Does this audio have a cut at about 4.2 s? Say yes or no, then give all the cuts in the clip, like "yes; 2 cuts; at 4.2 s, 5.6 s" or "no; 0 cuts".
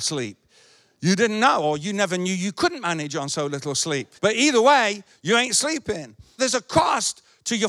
yes; 2 cuts; at 4.2 s, 6.4 s